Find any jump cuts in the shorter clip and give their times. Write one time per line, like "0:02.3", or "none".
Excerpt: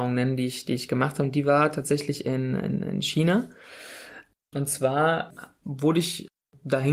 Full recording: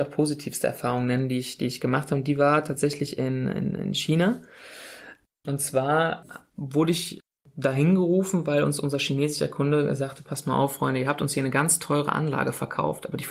none